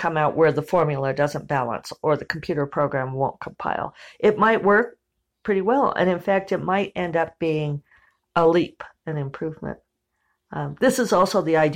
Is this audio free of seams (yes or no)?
yes